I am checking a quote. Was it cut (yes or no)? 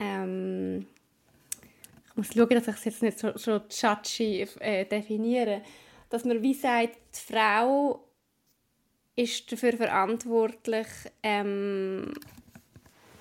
no